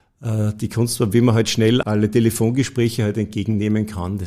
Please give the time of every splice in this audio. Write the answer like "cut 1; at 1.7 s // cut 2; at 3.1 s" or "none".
cut 1; at 1.8 s